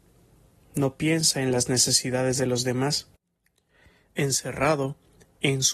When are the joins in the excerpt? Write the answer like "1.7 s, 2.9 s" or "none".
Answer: none